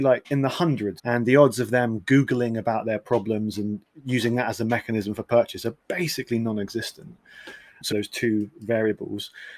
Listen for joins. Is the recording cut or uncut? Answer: cut